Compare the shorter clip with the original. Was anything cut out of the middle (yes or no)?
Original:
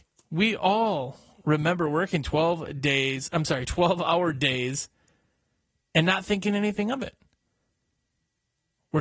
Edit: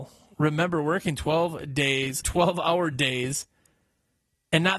yes